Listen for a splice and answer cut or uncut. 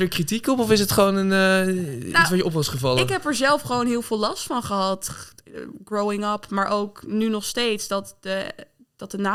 uncut